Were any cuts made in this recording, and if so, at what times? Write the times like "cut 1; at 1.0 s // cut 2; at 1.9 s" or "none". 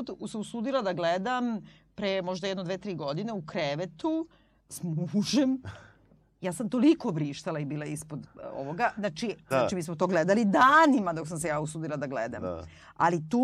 cut 1; at 4.6 s // cut 2; at 9.5 s